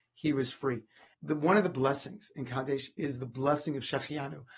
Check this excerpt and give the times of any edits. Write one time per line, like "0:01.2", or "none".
0:01.1